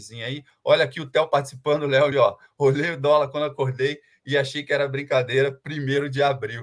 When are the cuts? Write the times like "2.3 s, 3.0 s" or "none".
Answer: 2.1 s